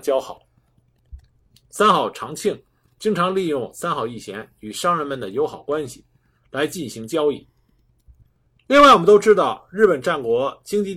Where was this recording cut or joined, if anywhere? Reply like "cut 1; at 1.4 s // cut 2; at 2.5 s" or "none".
cut 1; at 1.5 s